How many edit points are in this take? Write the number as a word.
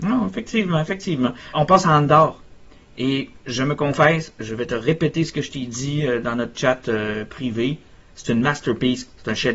two